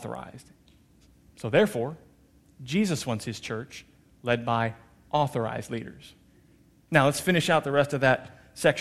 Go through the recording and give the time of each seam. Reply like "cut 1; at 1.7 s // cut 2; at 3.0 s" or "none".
none